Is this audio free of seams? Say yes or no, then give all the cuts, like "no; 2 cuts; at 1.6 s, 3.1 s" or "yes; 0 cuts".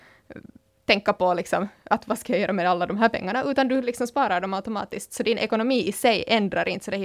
yes; 0 cuts